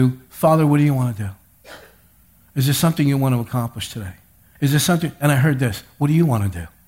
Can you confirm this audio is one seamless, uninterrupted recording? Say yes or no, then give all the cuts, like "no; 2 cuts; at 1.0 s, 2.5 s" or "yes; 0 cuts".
no; 1 cut; at 4.6 s